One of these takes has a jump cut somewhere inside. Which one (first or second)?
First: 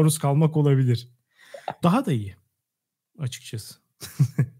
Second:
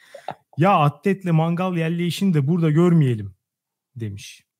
first